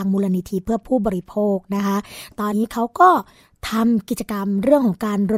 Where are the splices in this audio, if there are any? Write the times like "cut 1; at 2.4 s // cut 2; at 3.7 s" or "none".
cut 1; at 2.5 s